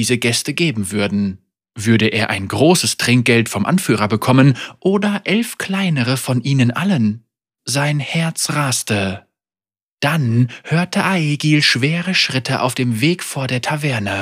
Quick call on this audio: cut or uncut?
uncut